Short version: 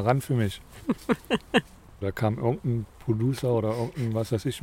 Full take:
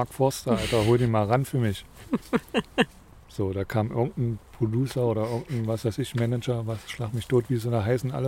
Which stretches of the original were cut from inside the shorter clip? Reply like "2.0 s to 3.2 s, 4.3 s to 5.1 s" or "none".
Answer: 3.2 s to 3.5 s